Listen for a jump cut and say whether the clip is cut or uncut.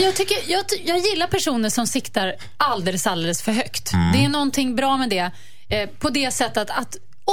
uncut